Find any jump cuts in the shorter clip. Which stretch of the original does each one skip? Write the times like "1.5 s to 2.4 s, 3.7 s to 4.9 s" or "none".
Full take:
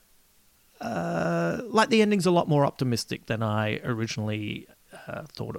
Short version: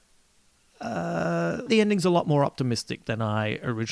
1.7 s to 1.9 s